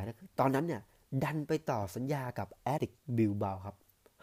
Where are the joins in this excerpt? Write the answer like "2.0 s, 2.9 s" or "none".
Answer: 2.8 s